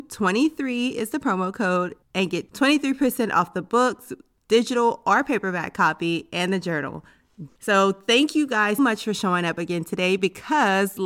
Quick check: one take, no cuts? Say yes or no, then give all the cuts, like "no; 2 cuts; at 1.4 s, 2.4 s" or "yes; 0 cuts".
no; 2 cuts; at 7.5 s, 8.8 s